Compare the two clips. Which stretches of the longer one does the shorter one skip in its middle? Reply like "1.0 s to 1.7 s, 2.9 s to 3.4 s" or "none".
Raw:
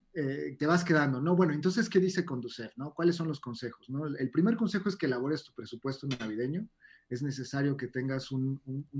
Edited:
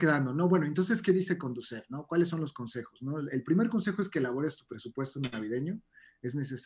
none